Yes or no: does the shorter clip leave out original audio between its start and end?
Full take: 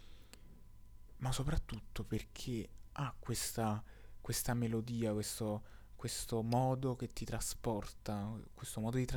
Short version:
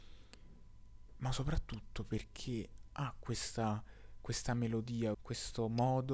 yes